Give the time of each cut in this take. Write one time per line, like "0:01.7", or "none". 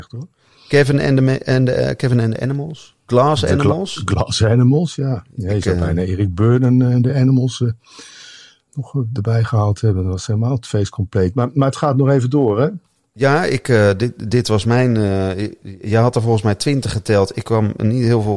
none